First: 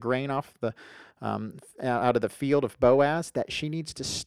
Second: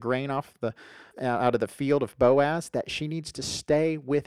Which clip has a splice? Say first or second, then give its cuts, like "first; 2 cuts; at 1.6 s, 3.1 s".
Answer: second; 1 cut; at 1.1 s